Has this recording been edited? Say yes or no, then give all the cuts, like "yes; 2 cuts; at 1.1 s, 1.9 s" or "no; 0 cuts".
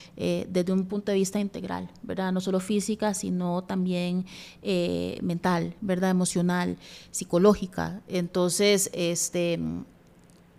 no; 0 cuts